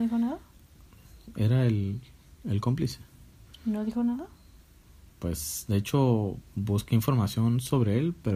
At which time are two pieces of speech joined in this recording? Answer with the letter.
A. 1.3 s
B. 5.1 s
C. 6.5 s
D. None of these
D